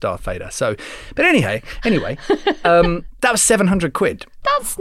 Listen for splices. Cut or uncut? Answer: uncut